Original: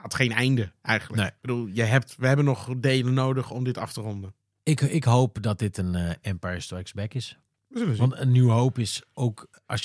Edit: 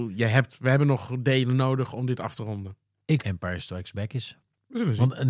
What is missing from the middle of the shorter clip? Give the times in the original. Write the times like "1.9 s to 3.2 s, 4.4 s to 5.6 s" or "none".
4.8 s to 6.2 s